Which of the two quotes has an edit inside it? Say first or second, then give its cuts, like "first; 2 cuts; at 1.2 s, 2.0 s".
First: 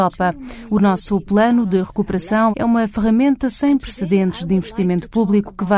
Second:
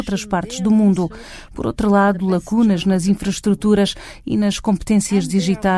first; 1 cut; at 2.5 s